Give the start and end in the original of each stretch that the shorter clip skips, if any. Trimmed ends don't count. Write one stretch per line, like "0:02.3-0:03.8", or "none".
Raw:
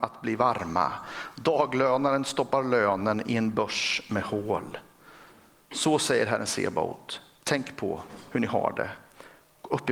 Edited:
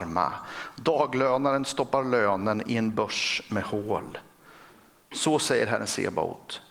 none